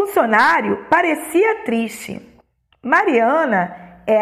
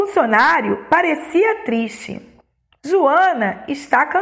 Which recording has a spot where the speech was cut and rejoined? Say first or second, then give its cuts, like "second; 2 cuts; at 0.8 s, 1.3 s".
second; 1 cut; at 2.8 s